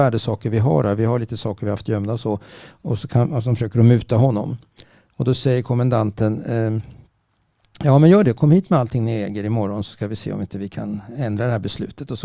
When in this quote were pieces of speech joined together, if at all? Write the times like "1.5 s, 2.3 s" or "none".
none